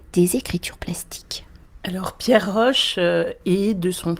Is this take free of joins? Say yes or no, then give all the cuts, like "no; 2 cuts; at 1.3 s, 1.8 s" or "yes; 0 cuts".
yes; 0 cuts